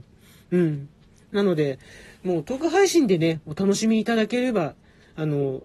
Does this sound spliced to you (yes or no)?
no